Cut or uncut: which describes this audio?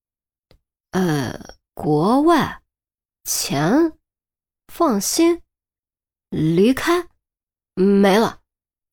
cut